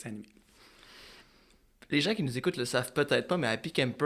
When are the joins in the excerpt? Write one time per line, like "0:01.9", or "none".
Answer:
none